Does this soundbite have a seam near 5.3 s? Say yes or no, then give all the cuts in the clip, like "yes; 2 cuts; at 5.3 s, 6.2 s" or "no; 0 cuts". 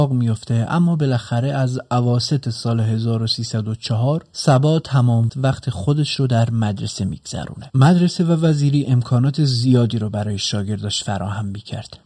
yes; 1 cut; at 5.3 s